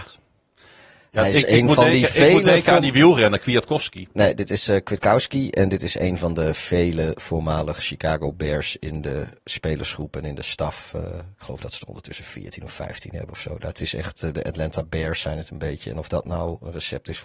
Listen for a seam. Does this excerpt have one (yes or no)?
no